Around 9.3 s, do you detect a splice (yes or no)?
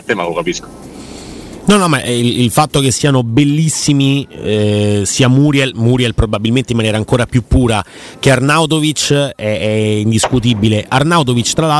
no